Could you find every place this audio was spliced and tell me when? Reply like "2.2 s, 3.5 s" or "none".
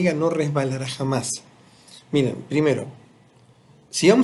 none